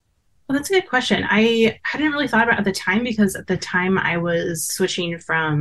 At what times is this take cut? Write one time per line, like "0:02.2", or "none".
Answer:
none